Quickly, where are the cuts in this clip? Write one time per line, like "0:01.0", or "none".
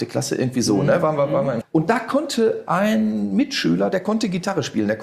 0:01.6